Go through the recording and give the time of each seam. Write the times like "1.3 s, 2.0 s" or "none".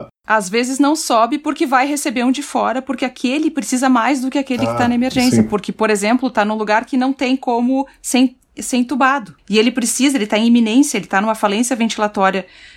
none